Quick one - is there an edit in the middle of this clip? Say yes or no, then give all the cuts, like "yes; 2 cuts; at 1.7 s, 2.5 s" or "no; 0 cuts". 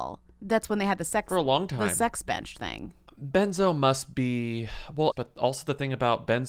yes; 1 cut; at 5.1 s